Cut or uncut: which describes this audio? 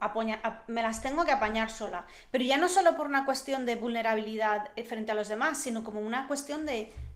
uncut